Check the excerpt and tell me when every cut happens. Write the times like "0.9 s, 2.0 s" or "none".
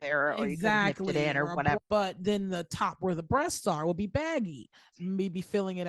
1.8 s, 4.9 s